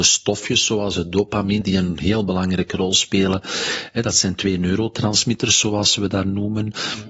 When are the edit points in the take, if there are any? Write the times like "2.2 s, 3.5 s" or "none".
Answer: 1.6 s